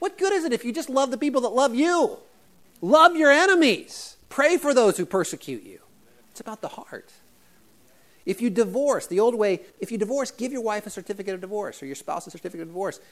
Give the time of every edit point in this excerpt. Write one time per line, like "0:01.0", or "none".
0:06.2
0:09.7